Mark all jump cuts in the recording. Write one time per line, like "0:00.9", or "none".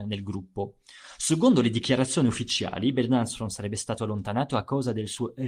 none